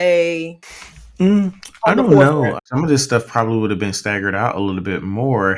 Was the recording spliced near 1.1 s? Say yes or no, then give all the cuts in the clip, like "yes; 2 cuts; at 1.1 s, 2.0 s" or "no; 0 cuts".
no; 1 cut; at 2.6 s